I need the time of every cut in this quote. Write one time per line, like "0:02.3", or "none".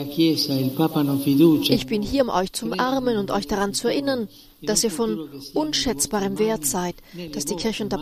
none